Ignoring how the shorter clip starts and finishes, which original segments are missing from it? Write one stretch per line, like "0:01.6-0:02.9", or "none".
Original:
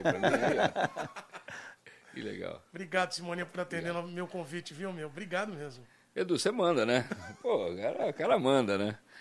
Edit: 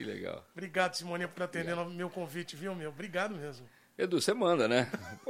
none